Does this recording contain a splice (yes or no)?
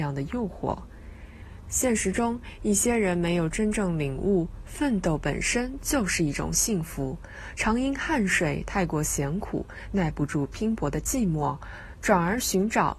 no